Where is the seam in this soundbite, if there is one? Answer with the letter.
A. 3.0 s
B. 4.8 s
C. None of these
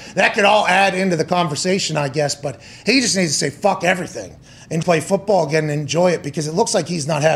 B